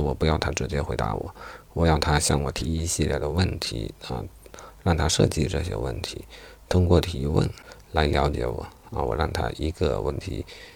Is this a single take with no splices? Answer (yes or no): yes